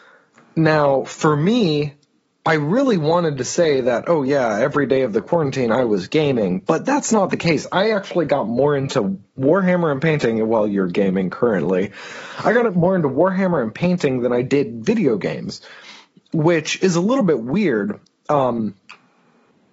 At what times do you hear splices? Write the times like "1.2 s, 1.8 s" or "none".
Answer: none